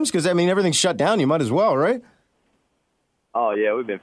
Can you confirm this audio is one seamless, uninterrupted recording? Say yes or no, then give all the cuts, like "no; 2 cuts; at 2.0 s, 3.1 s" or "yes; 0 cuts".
yes; 0 cuts